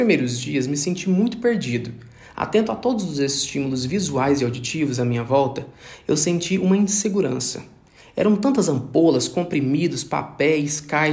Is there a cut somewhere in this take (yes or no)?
no